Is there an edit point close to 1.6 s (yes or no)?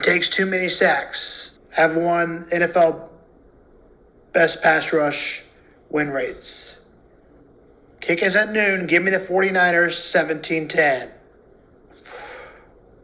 yes